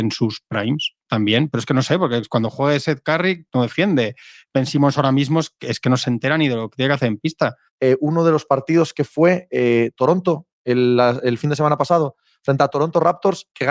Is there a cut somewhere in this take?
yes; 1 cut; at 7.7 s

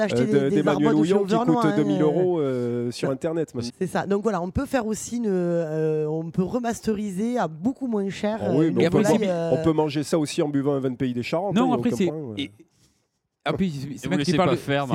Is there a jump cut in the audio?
yes; 2 cuts; at 3.7 s, 12.1 s

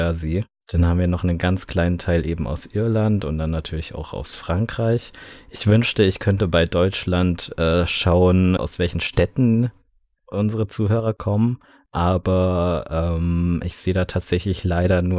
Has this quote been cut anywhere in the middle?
yes; 1 cut; at 8.6 s

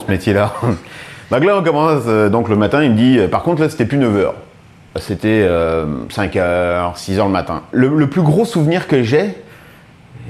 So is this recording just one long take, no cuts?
no; 1 cut; at 7.7 s

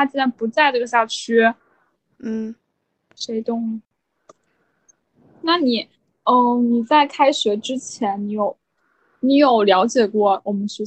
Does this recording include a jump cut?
no; 0 cuts

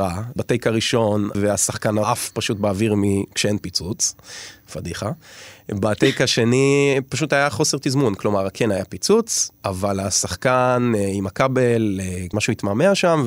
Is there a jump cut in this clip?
yes; 1 cut; at 1.3 s

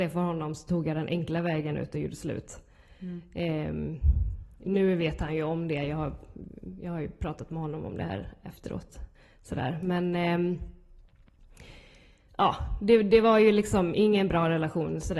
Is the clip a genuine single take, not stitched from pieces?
no; 1 cut; at 13.9 s

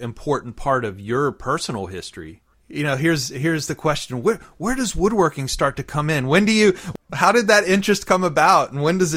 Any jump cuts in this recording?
yes; 1 cut; at 2.5 s

